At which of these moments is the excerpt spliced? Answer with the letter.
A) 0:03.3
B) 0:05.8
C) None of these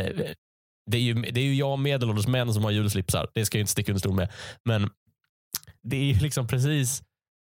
B